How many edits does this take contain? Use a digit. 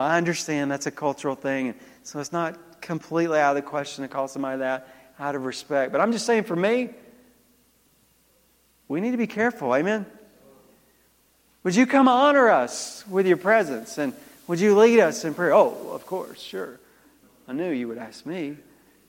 0